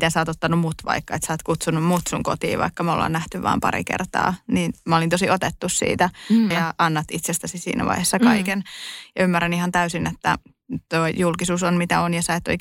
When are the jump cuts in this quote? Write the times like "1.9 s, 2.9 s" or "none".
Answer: 6.5 s